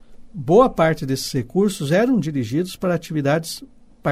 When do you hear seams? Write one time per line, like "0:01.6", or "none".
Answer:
none